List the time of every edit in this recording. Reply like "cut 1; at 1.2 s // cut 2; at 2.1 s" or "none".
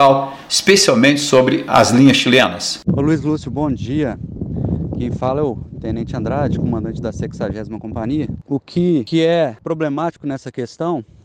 cut 1; at 8.4 s